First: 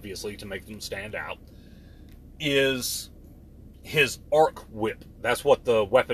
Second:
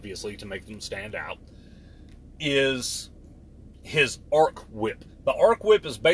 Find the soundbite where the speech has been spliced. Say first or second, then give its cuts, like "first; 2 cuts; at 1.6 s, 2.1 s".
second; 1 cut; at 5.1 s